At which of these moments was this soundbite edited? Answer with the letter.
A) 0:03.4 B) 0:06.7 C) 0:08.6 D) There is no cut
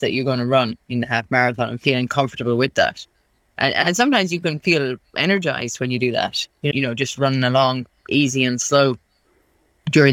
B